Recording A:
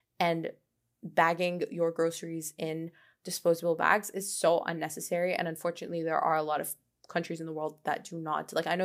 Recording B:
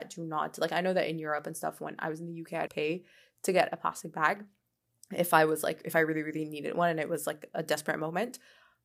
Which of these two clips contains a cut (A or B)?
B